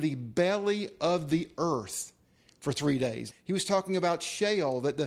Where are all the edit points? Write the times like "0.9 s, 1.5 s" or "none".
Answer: 3.3 s